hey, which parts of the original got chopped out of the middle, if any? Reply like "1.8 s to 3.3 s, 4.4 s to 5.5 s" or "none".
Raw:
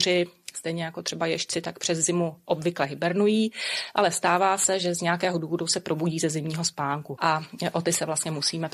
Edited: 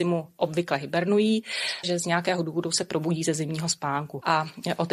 3.9 s to 4.8 s